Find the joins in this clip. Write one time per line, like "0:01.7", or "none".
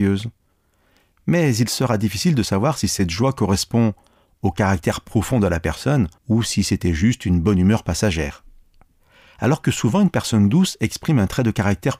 0:06.2